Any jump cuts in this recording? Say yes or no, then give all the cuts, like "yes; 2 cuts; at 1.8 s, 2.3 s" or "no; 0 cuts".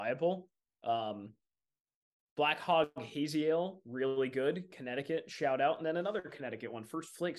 no; 0 cuts